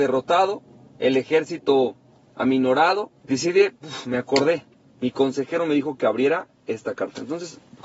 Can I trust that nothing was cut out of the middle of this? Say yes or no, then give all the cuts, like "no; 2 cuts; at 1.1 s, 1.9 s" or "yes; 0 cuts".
no; 1 cut; at 3.2 s